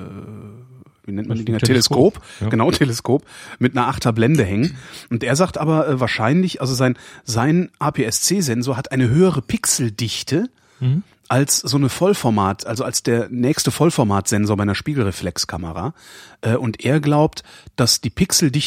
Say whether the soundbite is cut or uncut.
uncut